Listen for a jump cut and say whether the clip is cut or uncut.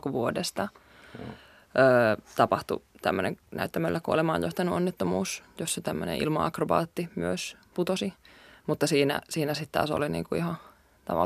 cut